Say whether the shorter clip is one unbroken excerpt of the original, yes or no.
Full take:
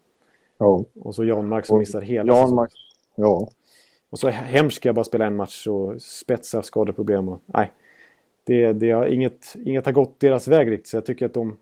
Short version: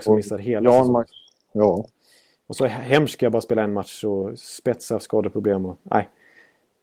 yes